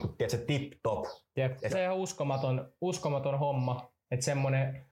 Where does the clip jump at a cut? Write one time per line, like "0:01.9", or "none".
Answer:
0:01.7